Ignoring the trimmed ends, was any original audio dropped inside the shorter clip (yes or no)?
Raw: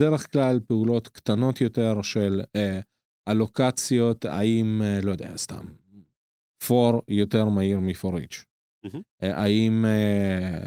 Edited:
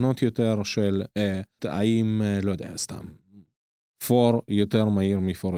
yes